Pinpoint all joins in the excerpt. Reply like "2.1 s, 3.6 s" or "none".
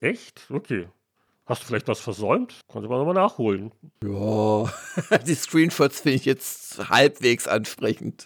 2.6 s, 4.0 s